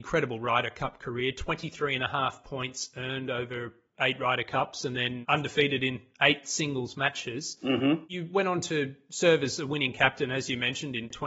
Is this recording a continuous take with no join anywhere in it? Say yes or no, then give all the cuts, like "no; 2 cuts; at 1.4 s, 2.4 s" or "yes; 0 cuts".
yes; 0 cuts